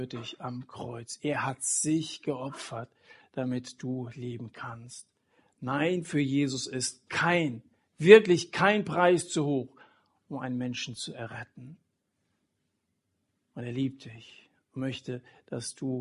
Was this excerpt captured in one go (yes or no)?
yes